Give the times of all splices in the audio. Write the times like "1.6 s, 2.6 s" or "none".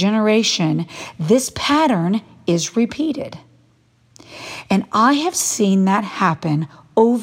none